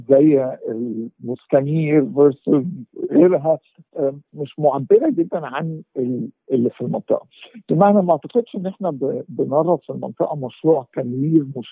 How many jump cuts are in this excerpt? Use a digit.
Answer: 1